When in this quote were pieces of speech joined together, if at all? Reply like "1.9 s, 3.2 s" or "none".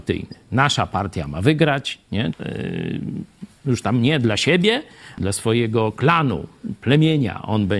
2.3 s, 5.2 s